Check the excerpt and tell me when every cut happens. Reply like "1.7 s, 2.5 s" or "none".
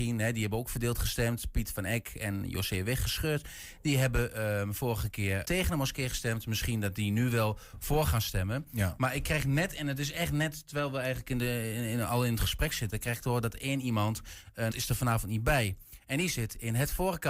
5.4 s, 14.7 s